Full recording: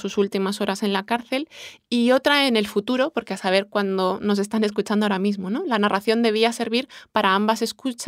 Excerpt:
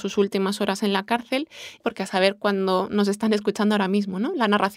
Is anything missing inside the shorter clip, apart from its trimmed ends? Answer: yes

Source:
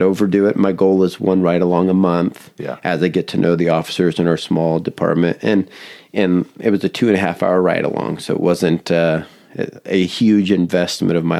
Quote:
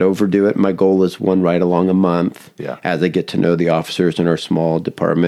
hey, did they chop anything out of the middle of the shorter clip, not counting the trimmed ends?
no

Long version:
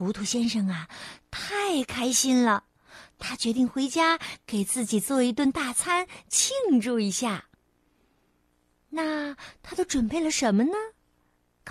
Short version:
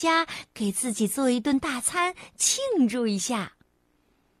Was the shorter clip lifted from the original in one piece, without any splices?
yes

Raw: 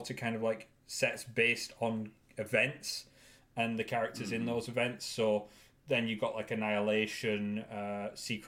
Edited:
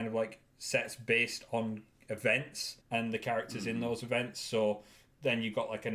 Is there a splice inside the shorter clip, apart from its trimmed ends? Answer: yes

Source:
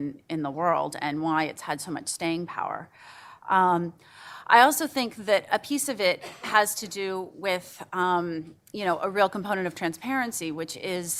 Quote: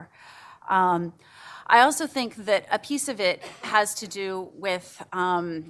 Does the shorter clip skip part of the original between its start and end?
no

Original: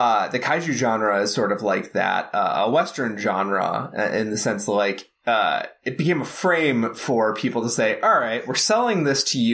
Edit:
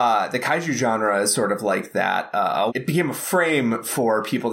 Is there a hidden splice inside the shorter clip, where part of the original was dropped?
yes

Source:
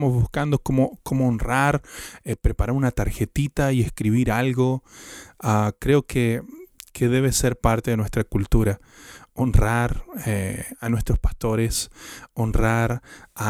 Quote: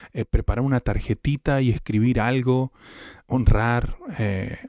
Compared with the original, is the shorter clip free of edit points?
no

